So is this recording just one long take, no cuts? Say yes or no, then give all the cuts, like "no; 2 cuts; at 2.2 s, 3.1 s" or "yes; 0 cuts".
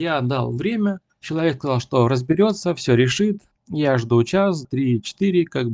no; 3 cuts; at 1.1 s, 3.5 s, 4.6 s